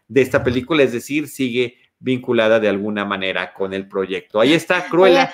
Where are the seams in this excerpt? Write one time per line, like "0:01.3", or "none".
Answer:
none